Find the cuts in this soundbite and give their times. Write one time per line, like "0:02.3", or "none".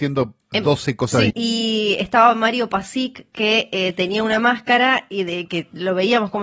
0:01.3
0:05.5